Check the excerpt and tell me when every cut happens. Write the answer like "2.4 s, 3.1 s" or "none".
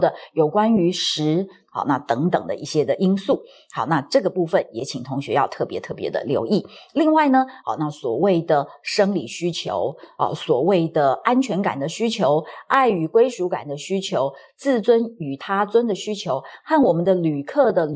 1.6 s, 7.6 s, 16.6 s

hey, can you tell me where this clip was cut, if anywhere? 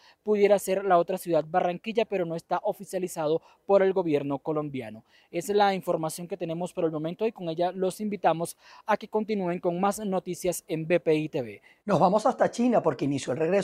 11.8 s

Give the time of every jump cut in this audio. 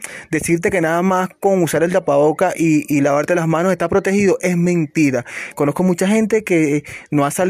none

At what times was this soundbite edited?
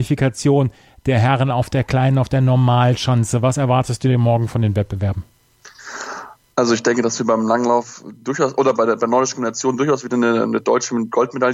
none

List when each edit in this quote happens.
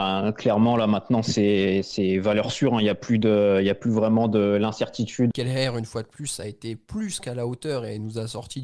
5.3 s

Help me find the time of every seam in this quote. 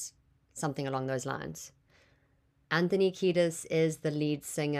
2.6 s

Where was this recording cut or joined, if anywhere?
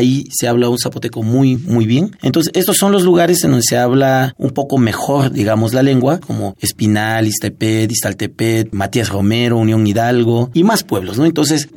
1.6 s, 6.2 s

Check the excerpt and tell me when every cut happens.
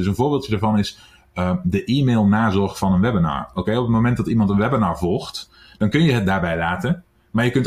none

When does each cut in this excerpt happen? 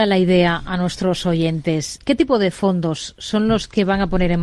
2.0 s

